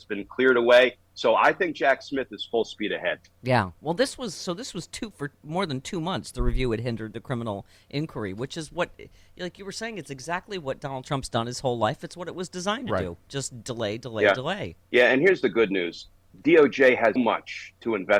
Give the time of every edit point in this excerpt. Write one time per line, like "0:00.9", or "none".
0:14.8
0:17.2